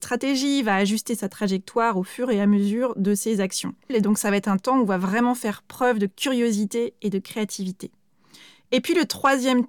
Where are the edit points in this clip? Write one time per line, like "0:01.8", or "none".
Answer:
0:03.9